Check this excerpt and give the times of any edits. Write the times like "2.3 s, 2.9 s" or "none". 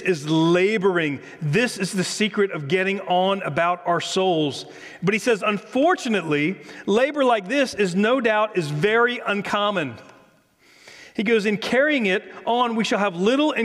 none